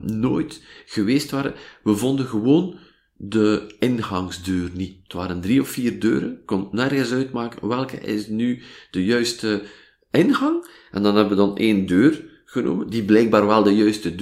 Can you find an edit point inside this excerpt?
no; 0 cuts

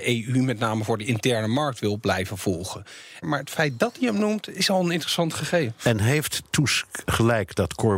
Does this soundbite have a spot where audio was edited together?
yes; 1 cut; at 3.2 s

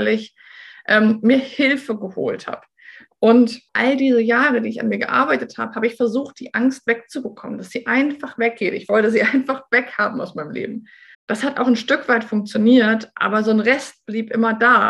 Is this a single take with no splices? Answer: no; 2 cuts; at 3.7 s, 11.1 s

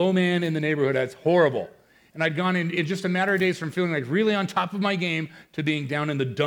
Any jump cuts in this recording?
no; 0 cuts

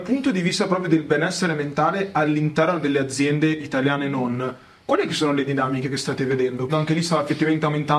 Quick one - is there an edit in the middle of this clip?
yes; 1 cut; at 6.7 s

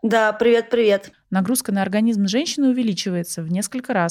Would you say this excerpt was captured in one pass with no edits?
no; 1 cut; at 1.1 s

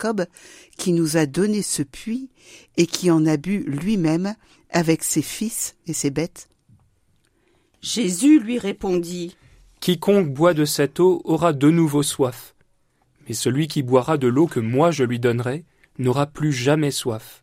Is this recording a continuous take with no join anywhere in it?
yes; 0 cuts

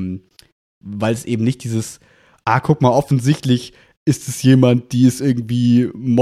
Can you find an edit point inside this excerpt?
no; 0 cuts

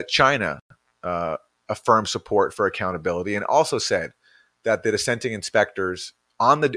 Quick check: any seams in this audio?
no; 0 cuts

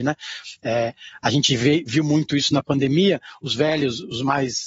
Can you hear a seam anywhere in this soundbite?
no; 0 cuts

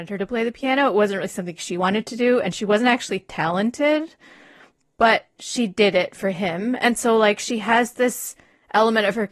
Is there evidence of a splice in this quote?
no; 0 cuts

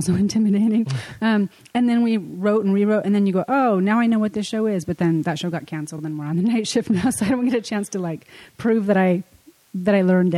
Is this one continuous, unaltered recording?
yes; 0 cuts

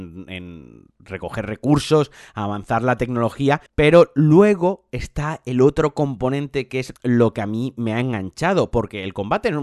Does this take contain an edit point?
yes; 2 cuts; at 3.7 s, 7.0 s

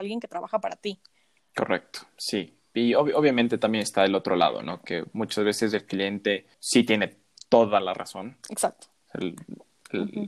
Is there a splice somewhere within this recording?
yes; 2 cuts; at 6.5 s, 9.0 s

